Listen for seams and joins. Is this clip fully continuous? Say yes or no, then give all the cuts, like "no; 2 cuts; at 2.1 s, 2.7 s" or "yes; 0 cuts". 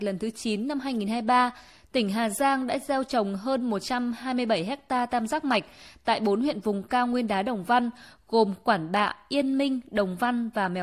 yes; 0 cuts